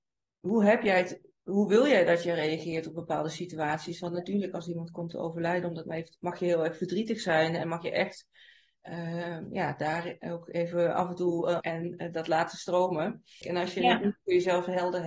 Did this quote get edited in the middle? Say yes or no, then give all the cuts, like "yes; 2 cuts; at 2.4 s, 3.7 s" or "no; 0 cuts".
yes; 2 cuts; at 11.6 s, 13.4 s